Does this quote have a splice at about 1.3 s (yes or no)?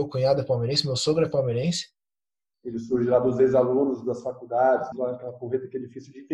no